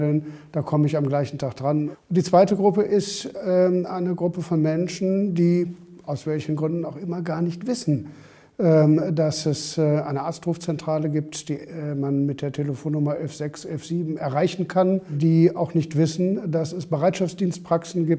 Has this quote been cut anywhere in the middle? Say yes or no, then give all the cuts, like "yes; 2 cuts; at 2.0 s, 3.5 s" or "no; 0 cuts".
no; 0 cuts